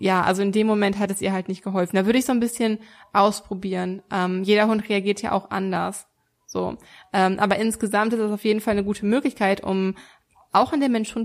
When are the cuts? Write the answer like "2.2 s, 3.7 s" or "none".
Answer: none